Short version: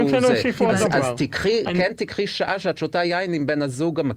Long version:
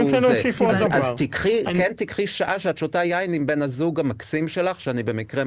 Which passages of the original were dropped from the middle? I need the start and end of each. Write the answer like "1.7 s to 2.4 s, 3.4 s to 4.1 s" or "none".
none